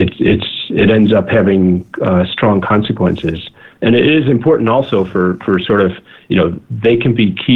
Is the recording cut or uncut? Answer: uncut